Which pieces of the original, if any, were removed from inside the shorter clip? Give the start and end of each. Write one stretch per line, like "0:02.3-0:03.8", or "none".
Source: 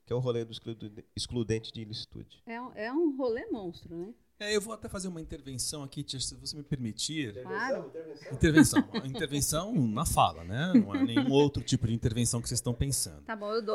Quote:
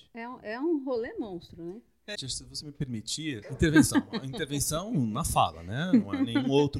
0:04.5-0:06.1
0:07.3-0:08.2